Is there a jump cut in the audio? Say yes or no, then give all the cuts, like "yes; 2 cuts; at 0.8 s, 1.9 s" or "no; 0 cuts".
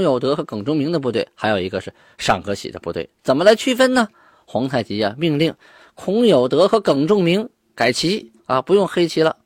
yes; 1 cut; at 8.4 s